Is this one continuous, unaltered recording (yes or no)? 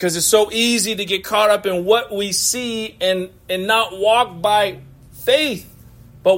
yes